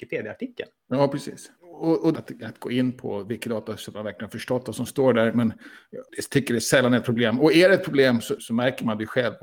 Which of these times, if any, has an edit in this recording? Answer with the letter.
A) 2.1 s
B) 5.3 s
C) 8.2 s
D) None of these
A